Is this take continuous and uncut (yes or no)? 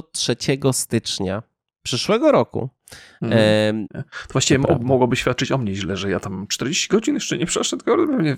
no